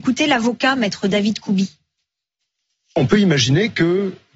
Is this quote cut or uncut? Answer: uncut